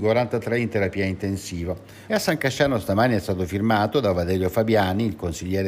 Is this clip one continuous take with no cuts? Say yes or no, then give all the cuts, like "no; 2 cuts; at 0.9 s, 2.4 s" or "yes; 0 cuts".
no; 1 cut; at 2.1 s